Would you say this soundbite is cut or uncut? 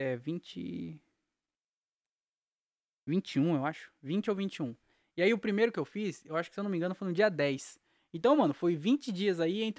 uncut